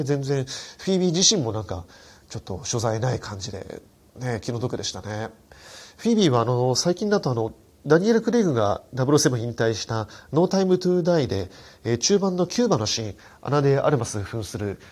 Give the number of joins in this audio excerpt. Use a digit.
0